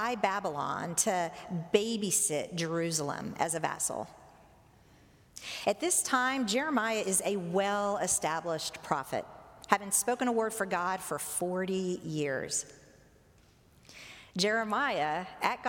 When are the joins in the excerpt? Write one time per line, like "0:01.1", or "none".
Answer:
none